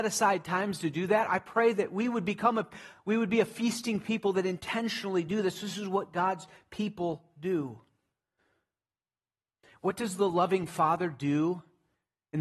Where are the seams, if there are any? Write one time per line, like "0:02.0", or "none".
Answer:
none

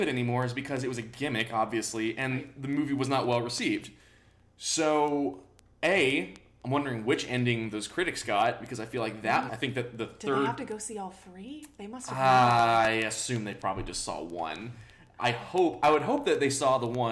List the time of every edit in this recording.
0:09.5

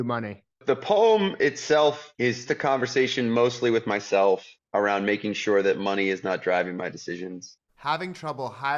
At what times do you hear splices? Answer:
0:02.5
0:07.7

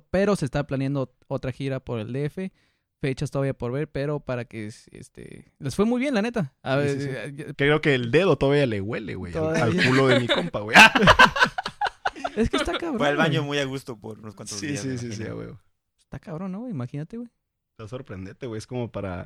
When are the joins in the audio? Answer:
0:07.5

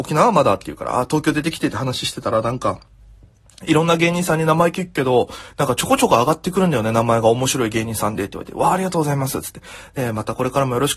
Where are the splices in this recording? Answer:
none

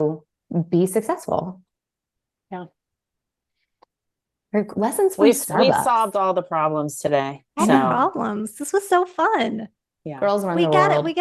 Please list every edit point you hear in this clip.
0:07.5

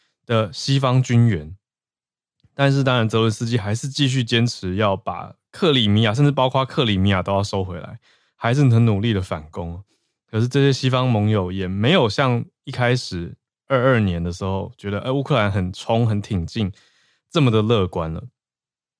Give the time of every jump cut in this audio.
none

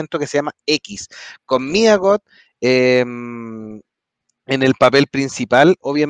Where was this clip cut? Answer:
none

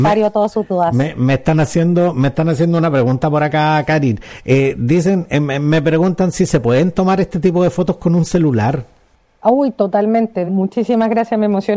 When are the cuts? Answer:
0:10.5

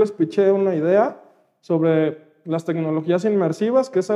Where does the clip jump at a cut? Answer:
none

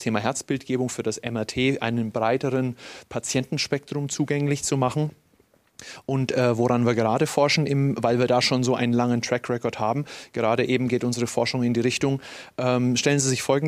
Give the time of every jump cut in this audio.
none

